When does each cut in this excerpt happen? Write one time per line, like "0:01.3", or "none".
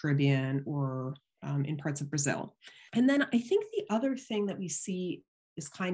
0:02.9